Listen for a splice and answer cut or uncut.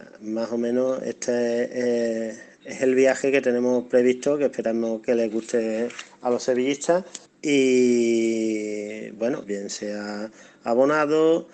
cut